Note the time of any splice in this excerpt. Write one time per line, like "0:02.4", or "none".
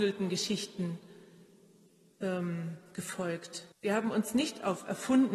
0:03.7